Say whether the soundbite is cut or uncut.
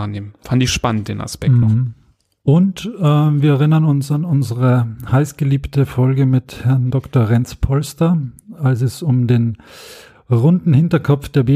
uncut